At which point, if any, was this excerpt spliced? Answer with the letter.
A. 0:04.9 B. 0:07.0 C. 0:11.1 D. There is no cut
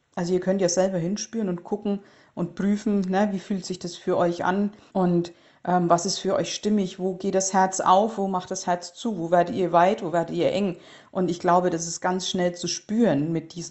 A